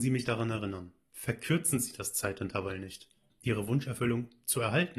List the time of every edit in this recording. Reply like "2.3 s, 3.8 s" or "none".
3.3 s